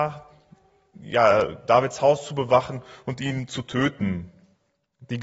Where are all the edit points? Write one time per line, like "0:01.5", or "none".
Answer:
0:00.9